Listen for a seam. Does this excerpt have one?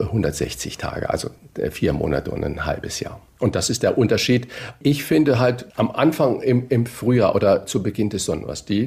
no; 0 cuts

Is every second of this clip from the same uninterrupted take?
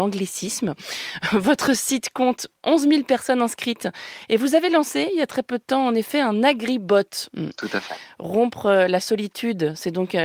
no; 1 cut; at 7.3 s

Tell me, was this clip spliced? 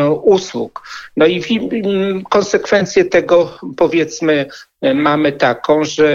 no; 0 cuts

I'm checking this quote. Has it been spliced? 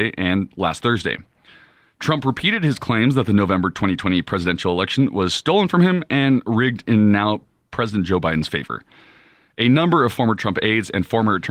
no; 0 cuts

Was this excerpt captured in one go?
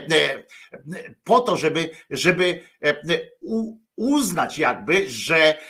no; 1 cut; at 3.8 s

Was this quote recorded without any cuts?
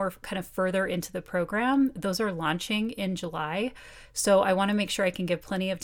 yes; 0 cuts

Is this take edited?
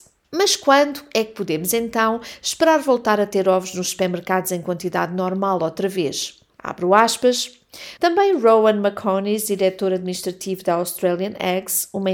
yes; 2 cuts; at 6.5 s, 8.0 s

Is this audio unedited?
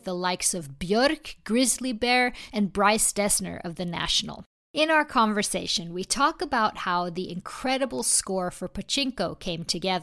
no; 1 cut; at 2.5 s

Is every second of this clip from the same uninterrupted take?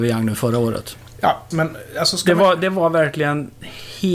no; 1 cut; at 1.5 s

